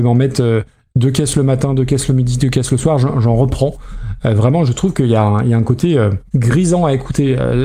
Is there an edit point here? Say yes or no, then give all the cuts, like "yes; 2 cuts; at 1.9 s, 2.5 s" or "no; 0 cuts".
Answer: no; 0 cuts